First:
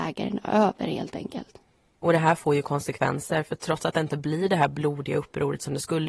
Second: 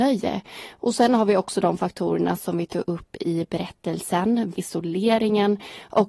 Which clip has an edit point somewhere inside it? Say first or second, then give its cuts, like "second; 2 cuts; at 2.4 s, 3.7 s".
second; 1 cut; at 4.5 s